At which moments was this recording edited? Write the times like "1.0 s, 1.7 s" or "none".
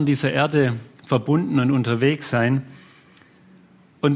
none